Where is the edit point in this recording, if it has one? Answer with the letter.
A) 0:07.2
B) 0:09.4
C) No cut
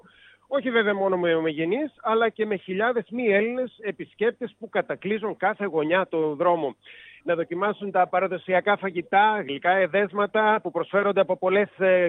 A